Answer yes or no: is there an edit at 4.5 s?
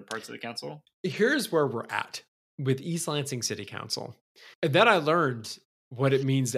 yes